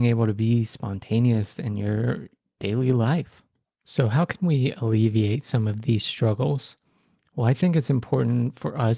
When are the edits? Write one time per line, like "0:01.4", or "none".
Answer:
none